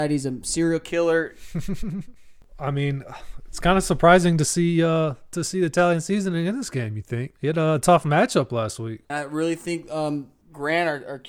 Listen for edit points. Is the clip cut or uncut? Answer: cut